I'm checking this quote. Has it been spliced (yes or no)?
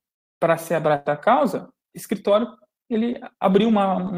yes